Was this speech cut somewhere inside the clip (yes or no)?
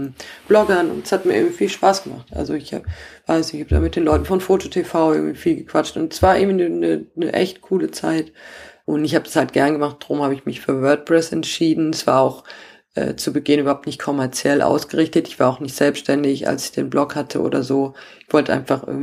yes